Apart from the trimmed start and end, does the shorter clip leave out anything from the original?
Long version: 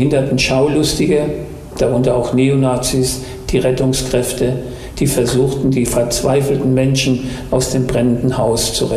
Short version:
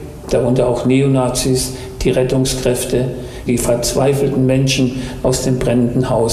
yes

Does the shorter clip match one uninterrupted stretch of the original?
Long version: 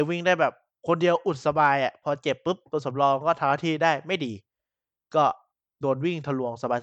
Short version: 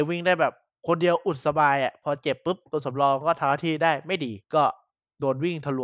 no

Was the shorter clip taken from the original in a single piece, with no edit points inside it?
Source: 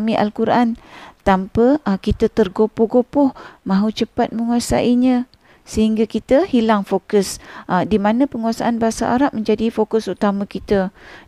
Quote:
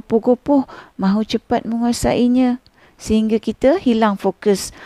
yes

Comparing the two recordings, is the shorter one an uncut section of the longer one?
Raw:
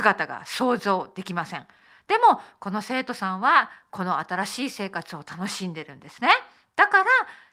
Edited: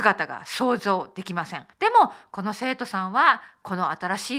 no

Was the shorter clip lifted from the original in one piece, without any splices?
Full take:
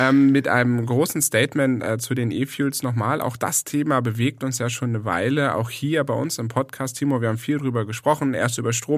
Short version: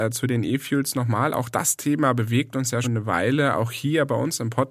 no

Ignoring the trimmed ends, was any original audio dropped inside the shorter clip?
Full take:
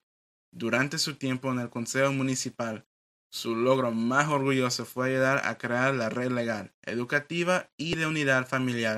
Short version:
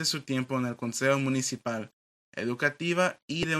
yes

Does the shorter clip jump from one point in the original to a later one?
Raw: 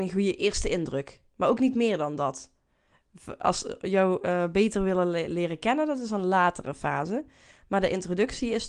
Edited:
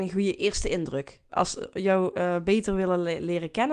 yes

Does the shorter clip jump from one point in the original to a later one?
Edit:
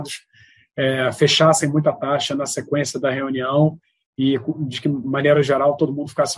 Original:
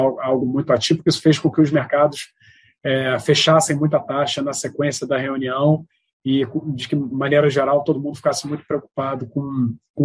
no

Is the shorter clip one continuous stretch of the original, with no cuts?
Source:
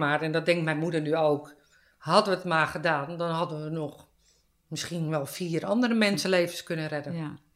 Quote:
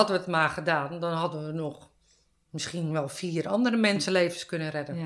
yes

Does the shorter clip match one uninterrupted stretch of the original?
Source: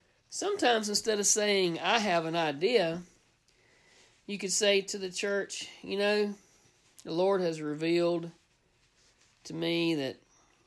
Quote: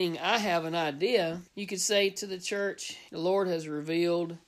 no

